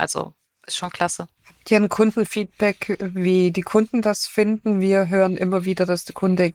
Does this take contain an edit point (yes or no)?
no